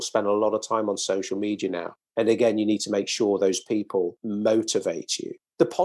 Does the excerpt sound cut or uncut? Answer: uncut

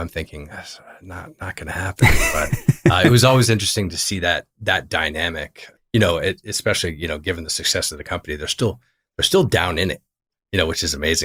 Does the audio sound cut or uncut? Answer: uncut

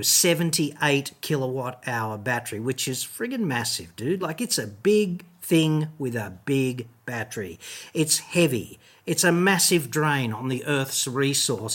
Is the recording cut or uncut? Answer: uncut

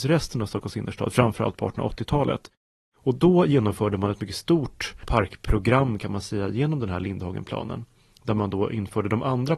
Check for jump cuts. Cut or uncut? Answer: uncut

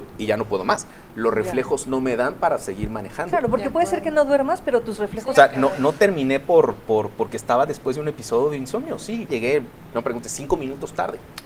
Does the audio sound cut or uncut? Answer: cut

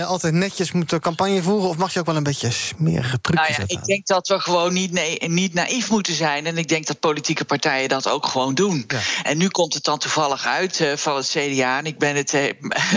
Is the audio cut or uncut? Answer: uncut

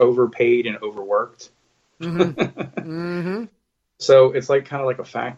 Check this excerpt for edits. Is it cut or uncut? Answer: uncut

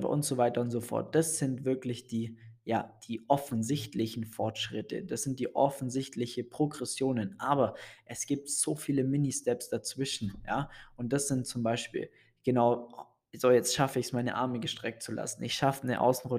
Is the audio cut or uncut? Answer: uncut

